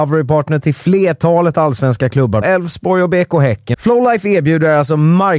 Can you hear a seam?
yes; 2 cuts; at 2.4 s, 3.7 s

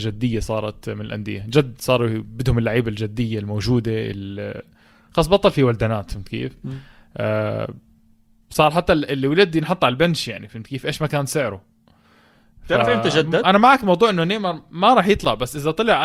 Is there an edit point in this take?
no; 0 cuts

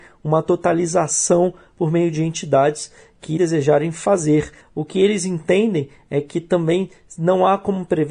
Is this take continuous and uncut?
no; 2 cuts; at 3.4 s, 4.6 s

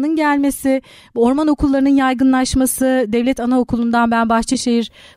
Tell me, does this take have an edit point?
no; 0 cuts

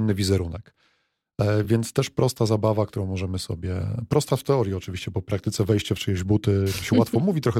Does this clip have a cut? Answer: no; 0 cuts

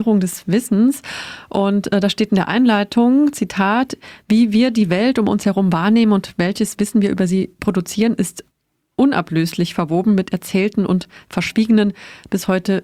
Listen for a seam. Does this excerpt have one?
no; 0 cuts

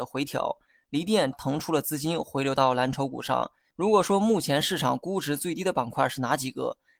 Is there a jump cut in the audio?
yes; 2 cuts; at 1.3 s, 3.7 s

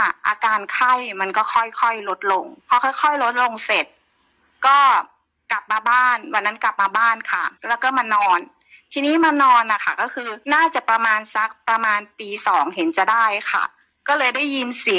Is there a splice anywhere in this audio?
yes; 3 cuts; at 2.6 s, 7.6 s, 10.4 s

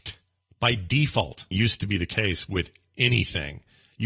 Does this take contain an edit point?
yes; 1 cut; at 1.5 s

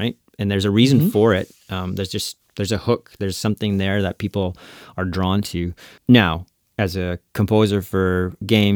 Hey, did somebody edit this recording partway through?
no; 0 cuts

